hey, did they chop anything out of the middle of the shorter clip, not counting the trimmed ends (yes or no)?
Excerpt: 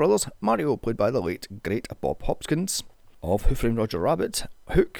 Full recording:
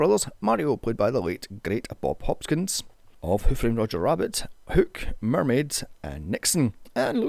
no